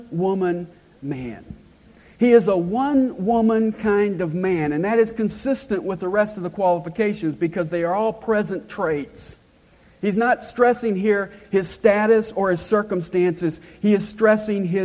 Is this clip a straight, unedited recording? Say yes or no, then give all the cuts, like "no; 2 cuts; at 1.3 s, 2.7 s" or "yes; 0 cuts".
yes; 0 cuts